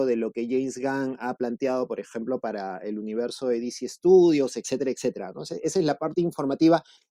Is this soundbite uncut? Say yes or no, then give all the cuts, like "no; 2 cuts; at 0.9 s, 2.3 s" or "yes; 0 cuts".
yes; 0 cuts